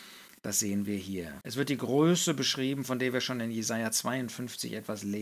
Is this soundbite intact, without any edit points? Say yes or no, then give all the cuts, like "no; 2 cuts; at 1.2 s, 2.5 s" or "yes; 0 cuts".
no; 1 cut; at 1.4 s